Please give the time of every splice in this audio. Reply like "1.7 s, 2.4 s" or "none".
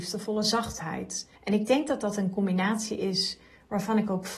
1.4 s